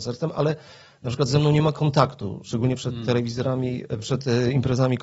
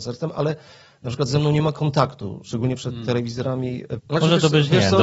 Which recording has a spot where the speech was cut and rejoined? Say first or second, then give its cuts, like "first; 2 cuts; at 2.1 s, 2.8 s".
second; 1 cut; at 4.0 s